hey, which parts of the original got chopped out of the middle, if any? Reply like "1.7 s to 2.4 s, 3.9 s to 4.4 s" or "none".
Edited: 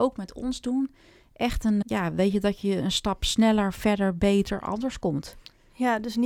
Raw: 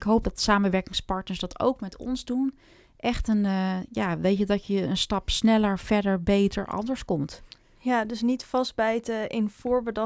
3.5 s to 3.9 s